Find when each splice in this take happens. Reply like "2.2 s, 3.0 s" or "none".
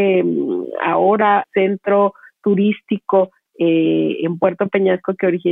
1.4 s